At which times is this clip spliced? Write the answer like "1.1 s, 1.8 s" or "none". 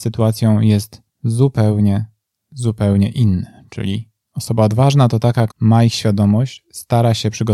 5.5 s